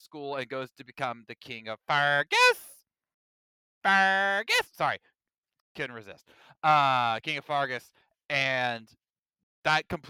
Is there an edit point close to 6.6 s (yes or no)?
no